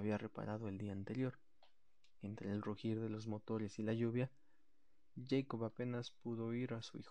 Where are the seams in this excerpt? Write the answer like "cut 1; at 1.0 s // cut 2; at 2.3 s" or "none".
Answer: none